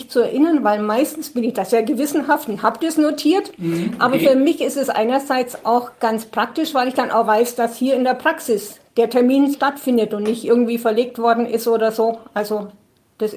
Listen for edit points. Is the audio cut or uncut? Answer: cut